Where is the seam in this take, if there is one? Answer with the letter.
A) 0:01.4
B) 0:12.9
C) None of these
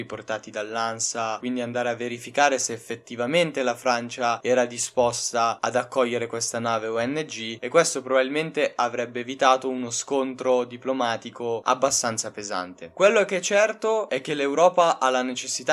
A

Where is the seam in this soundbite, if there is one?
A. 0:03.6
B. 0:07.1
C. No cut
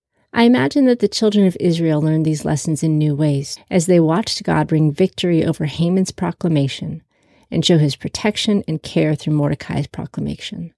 A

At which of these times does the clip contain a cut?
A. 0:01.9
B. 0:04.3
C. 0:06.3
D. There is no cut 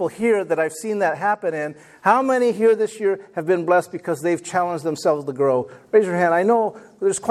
D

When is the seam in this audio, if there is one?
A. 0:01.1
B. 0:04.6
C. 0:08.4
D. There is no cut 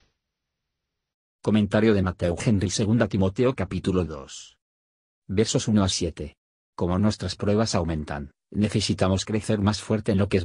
D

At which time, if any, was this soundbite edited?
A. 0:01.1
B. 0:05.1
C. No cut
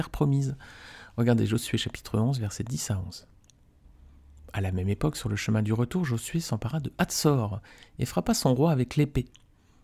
C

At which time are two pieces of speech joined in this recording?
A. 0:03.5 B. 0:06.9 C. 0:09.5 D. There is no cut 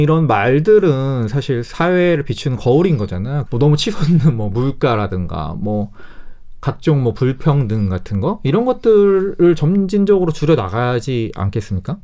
A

